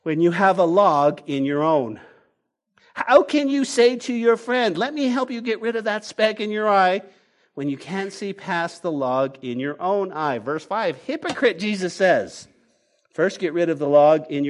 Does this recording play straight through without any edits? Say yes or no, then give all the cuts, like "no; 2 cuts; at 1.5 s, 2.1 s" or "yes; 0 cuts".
yes; 0 cuts